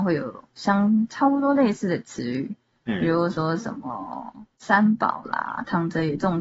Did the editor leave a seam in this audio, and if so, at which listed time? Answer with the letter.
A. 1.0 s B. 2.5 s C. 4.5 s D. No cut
C